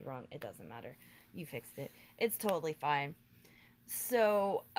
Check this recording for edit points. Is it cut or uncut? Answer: uncut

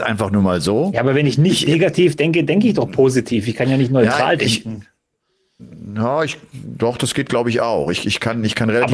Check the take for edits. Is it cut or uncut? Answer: uncut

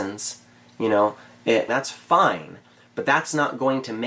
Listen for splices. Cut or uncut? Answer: cut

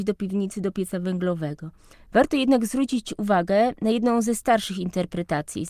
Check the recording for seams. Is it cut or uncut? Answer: cut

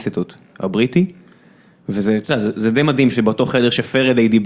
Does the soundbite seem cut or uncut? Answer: uncut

